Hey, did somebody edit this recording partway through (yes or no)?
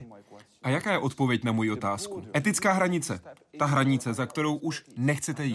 yes